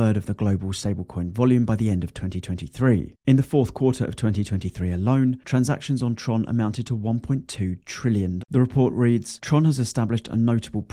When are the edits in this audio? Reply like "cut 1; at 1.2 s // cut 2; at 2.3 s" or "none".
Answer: cut 1; at 8.4 s